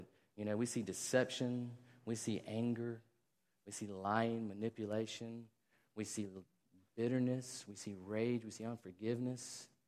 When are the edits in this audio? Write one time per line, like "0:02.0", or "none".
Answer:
none